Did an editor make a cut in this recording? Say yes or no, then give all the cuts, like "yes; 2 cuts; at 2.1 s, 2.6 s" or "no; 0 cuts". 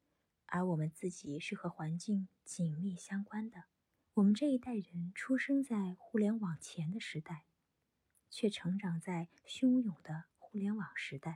yes; 1 cut; at 4.0 s